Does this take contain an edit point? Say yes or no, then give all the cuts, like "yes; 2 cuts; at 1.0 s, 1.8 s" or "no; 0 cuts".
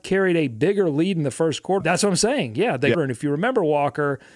yes; 2 cuts; at 1.8 s, 2.9 s